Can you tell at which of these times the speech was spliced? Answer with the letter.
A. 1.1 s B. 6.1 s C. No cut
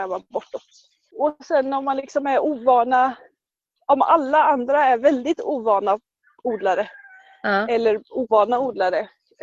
A